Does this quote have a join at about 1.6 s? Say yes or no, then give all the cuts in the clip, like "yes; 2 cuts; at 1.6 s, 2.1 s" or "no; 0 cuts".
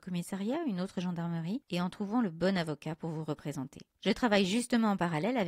yes; 1 cut; at 1.6 s